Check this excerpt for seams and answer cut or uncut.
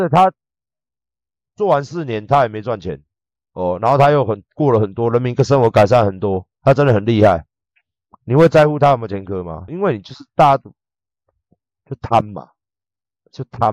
cut